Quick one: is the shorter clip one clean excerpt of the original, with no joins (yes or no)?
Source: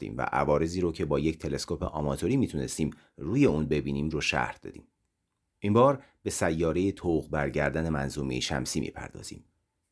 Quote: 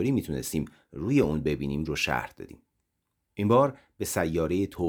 yes